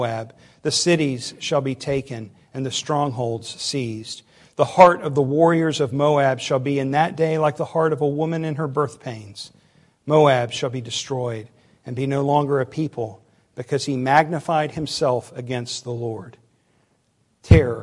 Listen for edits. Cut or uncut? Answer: uncut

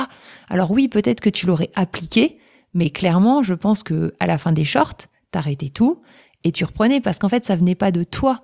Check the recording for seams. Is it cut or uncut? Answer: uncut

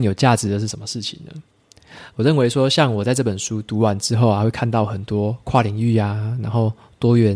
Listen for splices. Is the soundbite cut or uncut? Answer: uncut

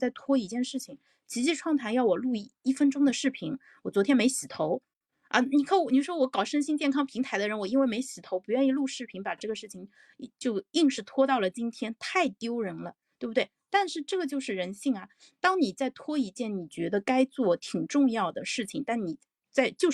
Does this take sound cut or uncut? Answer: uncut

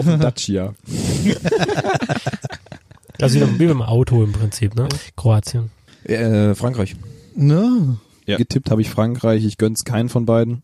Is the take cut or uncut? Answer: cut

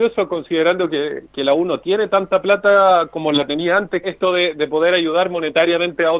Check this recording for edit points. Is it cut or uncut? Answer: cut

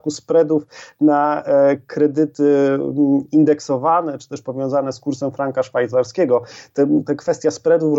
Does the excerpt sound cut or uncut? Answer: uncut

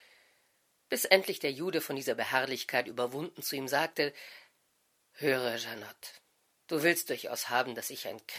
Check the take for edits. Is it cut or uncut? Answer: uncut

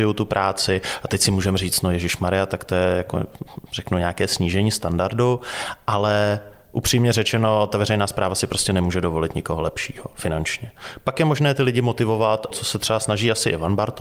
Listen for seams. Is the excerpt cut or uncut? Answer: cut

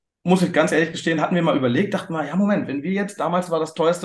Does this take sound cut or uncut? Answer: uncut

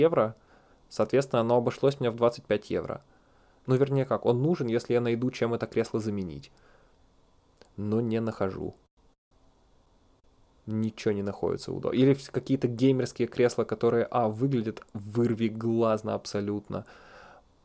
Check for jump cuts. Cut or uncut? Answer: cut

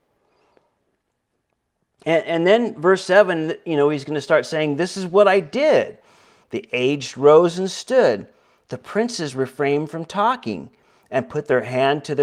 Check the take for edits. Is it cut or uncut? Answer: cut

